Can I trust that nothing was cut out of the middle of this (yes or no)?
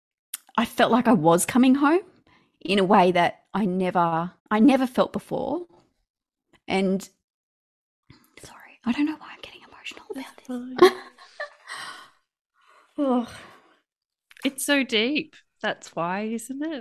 no